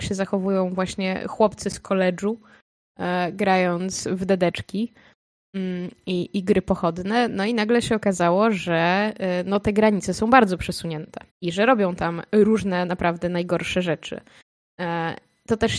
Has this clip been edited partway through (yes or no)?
yes